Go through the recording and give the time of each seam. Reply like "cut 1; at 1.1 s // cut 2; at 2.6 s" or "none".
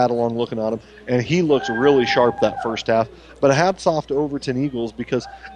none